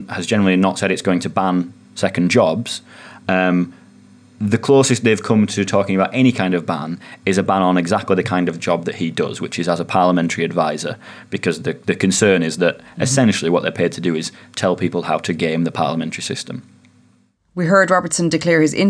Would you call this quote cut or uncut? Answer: uncut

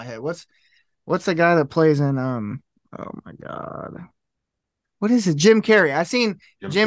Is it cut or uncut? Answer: uncut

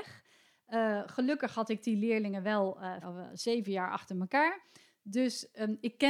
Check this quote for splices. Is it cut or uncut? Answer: cut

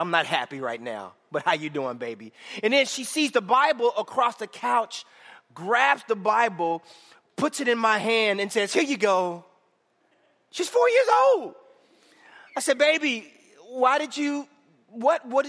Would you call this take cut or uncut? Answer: uncut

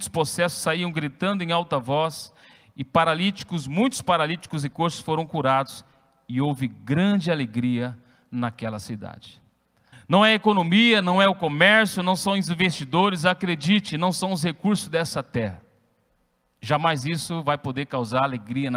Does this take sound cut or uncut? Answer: cut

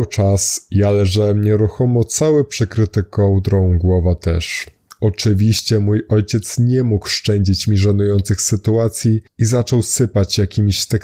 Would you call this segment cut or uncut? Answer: uncut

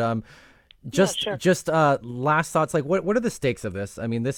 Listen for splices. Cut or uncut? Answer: uncut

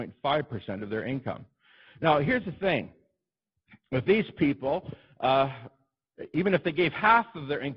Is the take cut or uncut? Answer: uncut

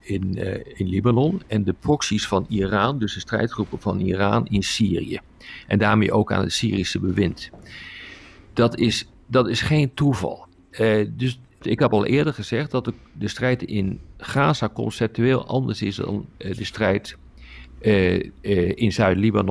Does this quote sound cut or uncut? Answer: uncut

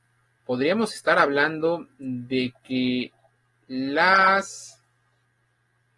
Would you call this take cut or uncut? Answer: uncut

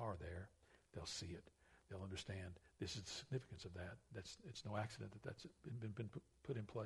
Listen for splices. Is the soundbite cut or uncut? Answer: uncut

